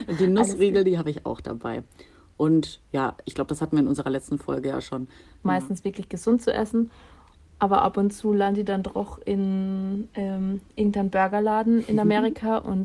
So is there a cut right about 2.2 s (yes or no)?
no